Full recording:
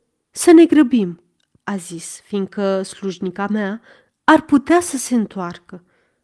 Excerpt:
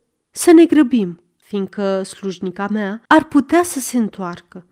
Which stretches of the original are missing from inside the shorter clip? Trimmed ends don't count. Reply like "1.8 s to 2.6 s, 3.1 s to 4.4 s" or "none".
1.4 s to 2.2 s, 3.9 s to 4.2 s

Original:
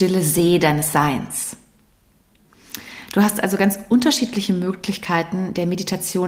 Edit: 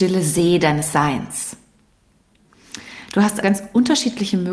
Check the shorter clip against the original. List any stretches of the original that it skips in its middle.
3.4 s to 3.6 s

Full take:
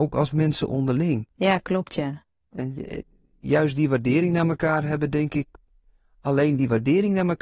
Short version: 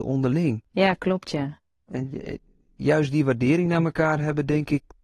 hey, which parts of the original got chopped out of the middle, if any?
none

